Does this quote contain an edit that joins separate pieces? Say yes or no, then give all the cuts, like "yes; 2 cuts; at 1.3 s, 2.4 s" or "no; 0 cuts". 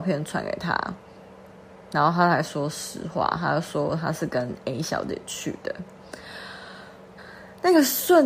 yes; 1 cut; at 7.2 s